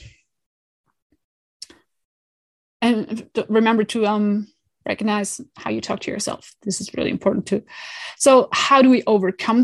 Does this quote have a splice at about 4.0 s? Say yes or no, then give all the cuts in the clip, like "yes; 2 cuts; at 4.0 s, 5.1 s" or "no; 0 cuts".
no; 0 cuts